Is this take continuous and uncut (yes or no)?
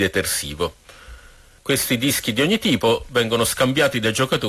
yes